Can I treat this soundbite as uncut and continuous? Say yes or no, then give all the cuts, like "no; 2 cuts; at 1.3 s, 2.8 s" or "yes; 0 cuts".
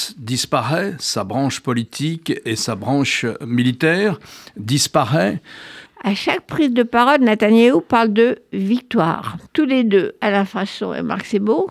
no; 2 cuts; at 5.9 s, 9.5 s